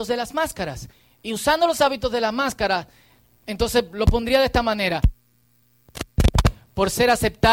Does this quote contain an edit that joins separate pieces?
no; 0 cuts

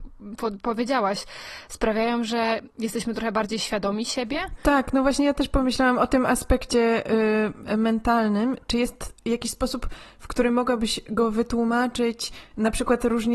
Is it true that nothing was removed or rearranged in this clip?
yes; 0 cuts

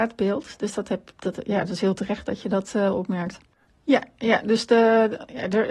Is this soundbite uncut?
no; 1 cut; at 3.7 s

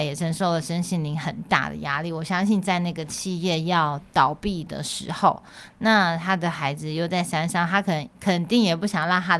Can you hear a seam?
no; 0 cuts

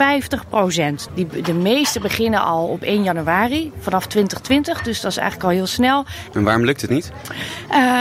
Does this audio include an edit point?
yes; 2 cuts; at 1.1 s, 6.3 s

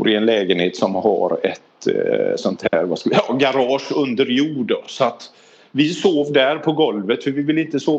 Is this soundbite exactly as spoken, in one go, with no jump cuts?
yes; 0 cuts

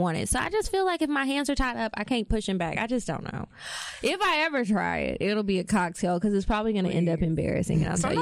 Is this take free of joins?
yes; 0 cuts

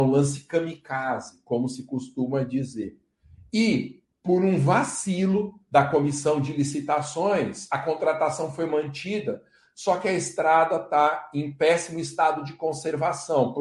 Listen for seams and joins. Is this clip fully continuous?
yes; 0 cuts

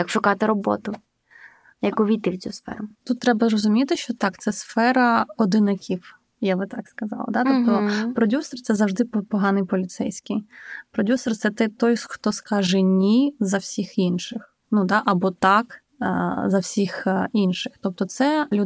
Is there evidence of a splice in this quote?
no; 0 cuts

